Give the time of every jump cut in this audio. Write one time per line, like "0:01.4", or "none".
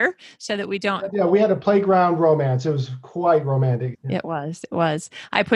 0:01.1
0:03.9